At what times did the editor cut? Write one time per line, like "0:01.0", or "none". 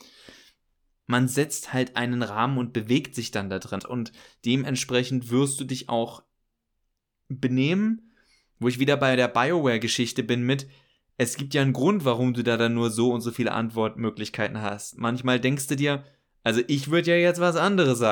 0:03.8